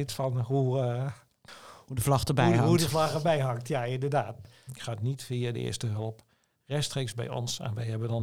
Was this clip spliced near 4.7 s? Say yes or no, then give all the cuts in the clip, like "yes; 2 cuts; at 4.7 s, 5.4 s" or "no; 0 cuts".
yes; 1 cut; at 4.7 s